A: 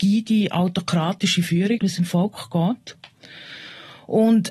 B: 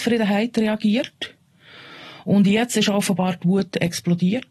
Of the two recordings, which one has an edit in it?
A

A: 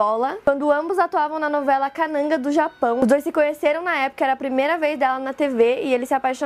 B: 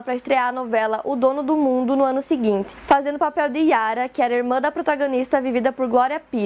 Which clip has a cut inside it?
A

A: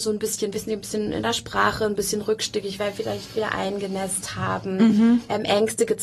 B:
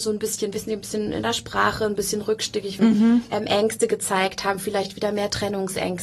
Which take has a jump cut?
B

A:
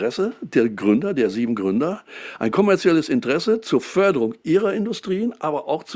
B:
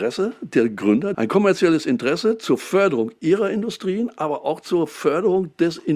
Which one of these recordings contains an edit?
B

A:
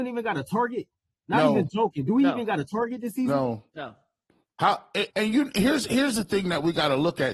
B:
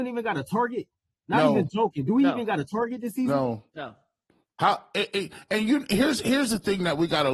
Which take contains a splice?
A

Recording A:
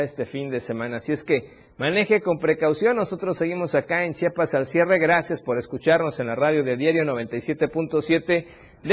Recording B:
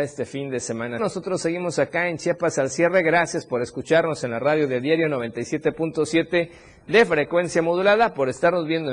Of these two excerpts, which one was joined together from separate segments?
B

